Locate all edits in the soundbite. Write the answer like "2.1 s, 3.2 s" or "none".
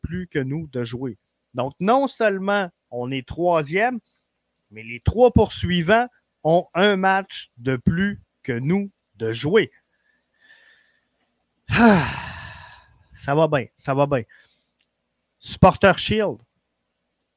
none